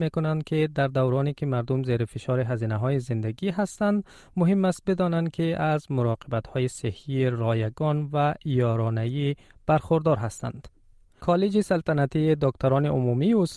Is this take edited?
yes; 1 cut; at 11.0 s

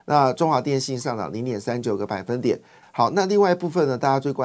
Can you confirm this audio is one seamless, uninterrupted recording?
no; 1 cut; at 2.8 s

